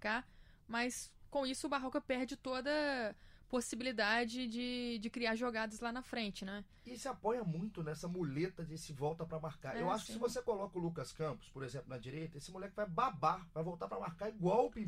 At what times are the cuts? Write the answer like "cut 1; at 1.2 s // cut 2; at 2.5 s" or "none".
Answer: none